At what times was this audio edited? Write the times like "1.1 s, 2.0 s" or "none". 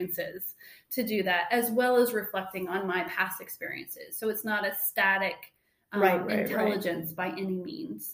none